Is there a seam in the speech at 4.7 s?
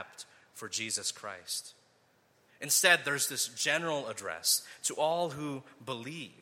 no; 1 cut; at 2.5 s

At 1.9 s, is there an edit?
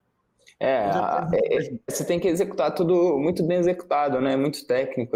yes; 1 cut; at 1.9 s

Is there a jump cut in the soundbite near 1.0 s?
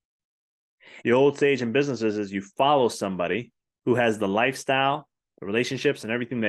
yes; 1 cut; at 1.0 s

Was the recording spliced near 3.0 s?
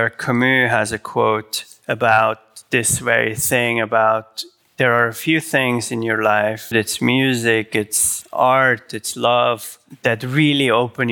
no; 1 cut; at 6.7 s

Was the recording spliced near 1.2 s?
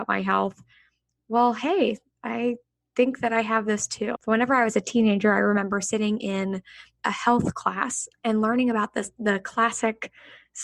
no; 2 cuts; at 4.2 s, 8.1 s

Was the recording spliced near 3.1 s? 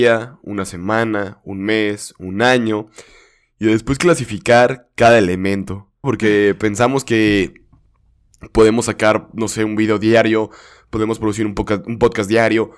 no; 1 cut; at 6.0 s

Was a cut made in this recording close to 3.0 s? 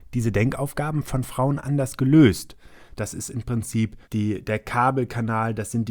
yes; 2 cuts; at 3.0 s, 4.0 s

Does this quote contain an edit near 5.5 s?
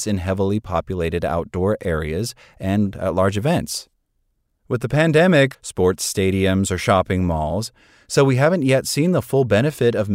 yes; 1 cut; at 5.5 s

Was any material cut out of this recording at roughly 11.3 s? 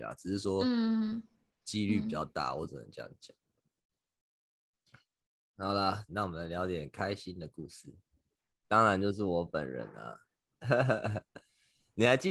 no; 2 cuts; at 6.1 s, 8.6 s

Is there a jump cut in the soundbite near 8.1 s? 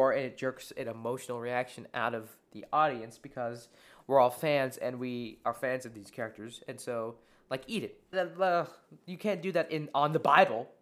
yes; 1 cut; at 8.1 s

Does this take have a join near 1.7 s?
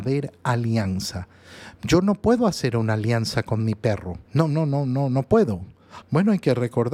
no; 2 cuts; at 4.3 s, 6.0 s

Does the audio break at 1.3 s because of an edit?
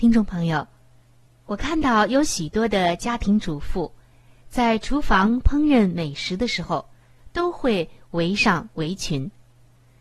no; 0 cuts

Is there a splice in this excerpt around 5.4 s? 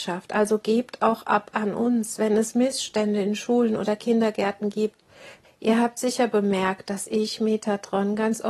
yes; 1 cut; at 5.4 s

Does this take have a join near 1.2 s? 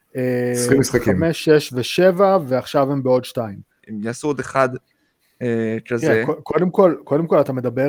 no; 1 cut; at 3.8 s

